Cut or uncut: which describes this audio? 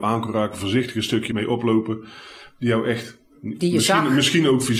cut